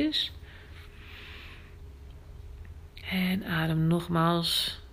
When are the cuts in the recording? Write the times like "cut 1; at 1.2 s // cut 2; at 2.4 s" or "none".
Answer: cut 1; at 3.0 s